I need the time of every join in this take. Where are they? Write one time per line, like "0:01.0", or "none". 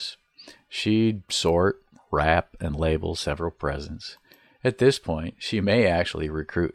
none